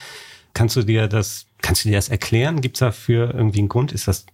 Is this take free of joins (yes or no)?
yes